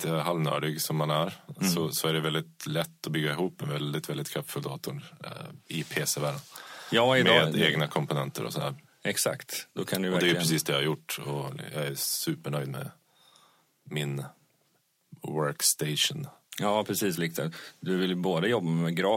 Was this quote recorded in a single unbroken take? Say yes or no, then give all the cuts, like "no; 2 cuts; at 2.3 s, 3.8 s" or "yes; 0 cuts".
no; 1 cut; at 17.2 s